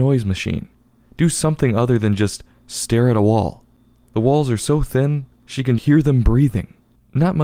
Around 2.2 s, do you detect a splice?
no; 2 cuts; at 4.1 s, 5.8 s

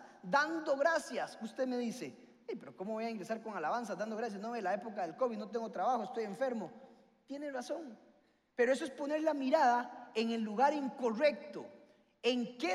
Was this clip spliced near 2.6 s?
no; 0 cuts

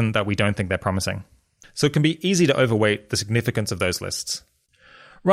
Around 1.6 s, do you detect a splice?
yes; 1 cut; at 1.6 s

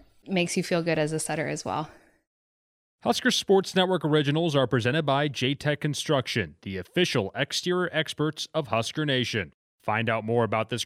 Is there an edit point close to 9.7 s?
no; 0 cuts

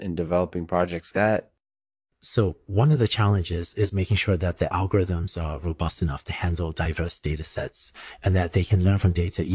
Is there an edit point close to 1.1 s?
yes; 2 cuts; at 1.1 s, 3.9 s

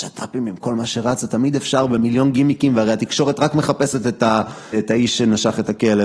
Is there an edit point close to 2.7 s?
no; 1 cut; at 4.7 s

